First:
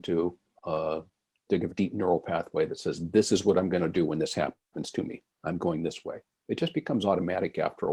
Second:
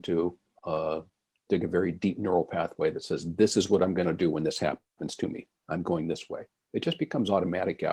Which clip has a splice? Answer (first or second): first